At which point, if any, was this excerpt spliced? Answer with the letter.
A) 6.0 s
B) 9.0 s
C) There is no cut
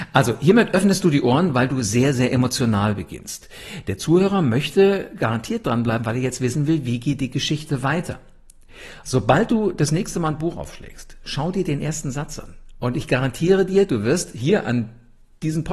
B